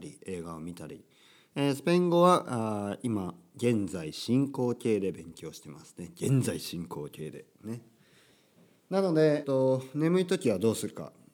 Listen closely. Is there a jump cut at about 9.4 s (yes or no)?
yes